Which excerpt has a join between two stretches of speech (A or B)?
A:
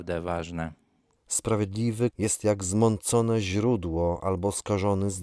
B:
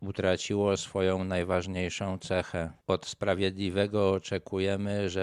A